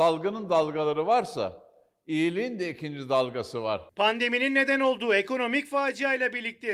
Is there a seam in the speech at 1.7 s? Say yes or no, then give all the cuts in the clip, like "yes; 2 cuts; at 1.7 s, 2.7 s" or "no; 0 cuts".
no; 0 cuts